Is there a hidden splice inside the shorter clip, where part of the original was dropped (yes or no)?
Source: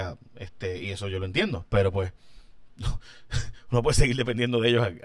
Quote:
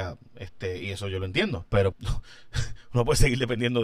yes